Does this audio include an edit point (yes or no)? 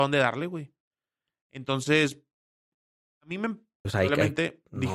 yes